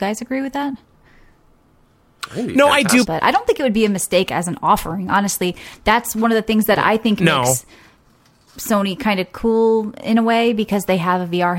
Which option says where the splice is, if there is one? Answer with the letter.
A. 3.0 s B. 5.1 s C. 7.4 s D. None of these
A